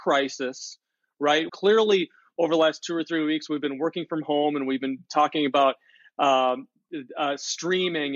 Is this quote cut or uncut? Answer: cut